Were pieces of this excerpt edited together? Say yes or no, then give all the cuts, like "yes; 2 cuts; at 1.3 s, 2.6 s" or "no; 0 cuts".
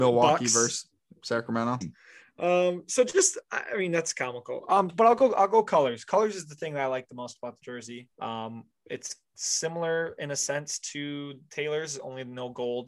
yes; 2 cuts; at 1.8 s, 8.1 s